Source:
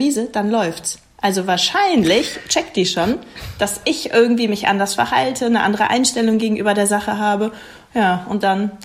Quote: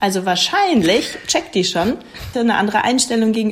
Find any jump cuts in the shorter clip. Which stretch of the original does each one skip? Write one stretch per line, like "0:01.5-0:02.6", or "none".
0:03.5-0:05.4